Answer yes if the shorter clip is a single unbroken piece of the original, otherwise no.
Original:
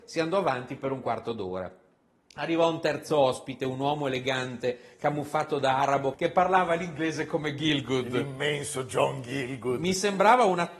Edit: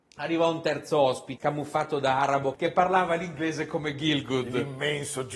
no